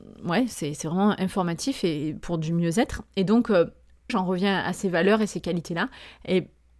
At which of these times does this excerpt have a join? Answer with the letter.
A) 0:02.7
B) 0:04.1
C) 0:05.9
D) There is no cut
B